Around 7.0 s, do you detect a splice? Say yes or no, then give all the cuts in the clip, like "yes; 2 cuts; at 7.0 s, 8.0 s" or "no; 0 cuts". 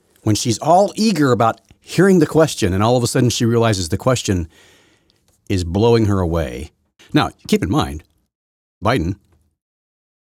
yes; 1 cut; at 7.0 s